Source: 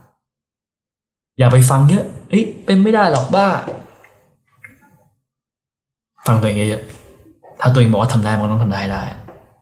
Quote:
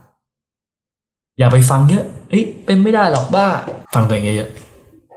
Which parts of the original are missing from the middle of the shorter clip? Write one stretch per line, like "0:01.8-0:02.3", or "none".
0:03.8-0:06.2